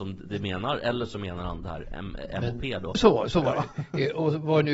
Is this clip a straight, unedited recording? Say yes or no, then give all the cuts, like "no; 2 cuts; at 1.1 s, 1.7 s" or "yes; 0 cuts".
no; 1 cut; at 2.9 s